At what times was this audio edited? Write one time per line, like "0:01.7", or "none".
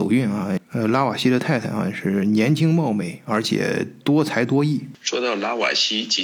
0:04.9